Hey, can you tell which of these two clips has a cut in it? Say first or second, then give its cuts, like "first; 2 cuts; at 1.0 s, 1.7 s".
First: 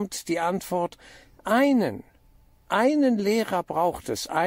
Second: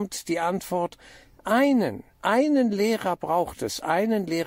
second; 1 cut; at 2.1 s